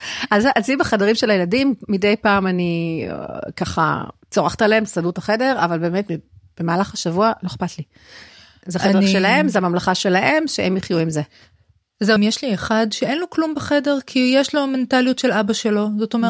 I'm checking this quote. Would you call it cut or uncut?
cut